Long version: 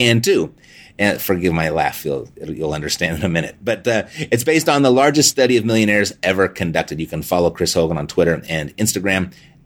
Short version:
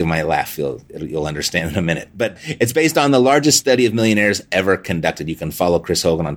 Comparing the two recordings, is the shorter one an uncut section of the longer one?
no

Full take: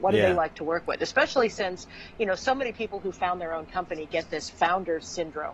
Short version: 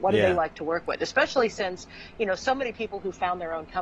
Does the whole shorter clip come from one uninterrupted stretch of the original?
yes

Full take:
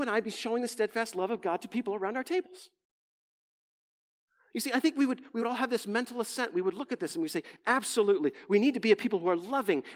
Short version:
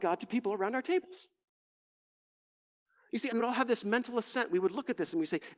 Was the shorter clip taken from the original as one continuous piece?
no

